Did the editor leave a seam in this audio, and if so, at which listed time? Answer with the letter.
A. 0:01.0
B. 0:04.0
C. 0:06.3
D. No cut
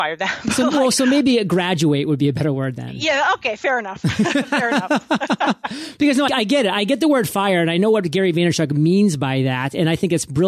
C